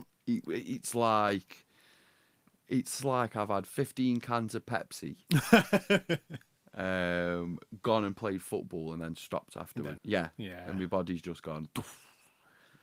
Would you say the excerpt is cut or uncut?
cut